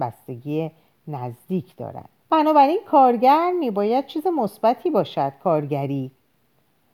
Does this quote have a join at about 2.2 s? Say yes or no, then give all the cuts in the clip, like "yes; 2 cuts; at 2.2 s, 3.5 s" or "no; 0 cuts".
yes; 1 cut; at 2.2 s